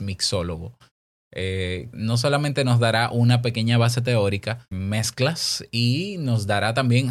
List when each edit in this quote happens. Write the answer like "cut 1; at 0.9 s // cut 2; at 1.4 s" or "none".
cut 1; at 1.9 s // cut 2; at 4.7 s